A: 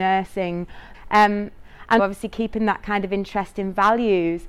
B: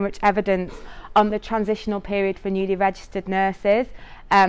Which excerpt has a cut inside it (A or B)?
A